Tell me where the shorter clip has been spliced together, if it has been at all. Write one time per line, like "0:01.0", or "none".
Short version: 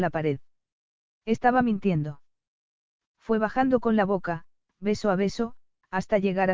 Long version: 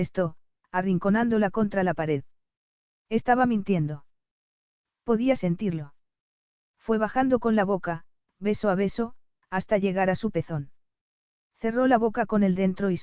0:03.1